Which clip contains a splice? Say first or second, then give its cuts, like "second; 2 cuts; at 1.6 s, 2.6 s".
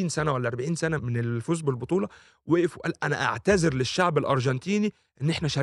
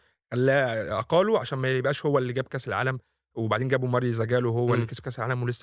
first; 1 cut; at 1.0 s